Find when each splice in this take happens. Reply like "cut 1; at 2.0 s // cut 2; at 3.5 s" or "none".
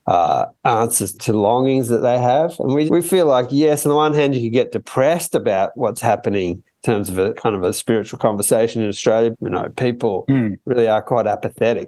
cut 1; at 1.1 s // cut 2; at 2.9 s // cut 3; at 9.3 s